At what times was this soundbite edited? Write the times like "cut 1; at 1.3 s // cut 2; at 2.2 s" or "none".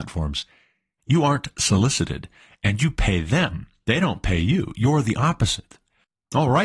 cut 1; at 1.0 s